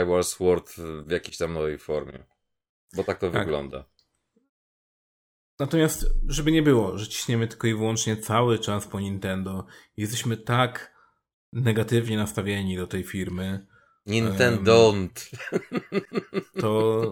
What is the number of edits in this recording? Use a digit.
0